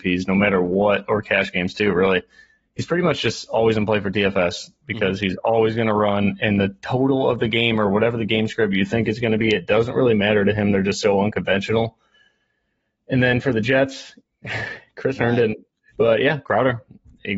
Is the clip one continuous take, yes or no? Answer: no